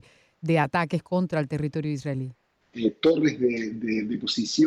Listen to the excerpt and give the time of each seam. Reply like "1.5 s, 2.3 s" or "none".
2.6 s